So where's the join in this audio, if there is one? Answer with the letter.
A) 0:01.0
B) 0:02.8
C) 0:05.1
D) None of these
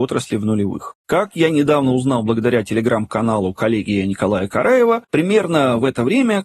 A